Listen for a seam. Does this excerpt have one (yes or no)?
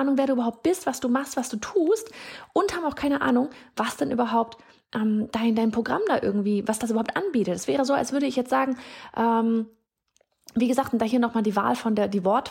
no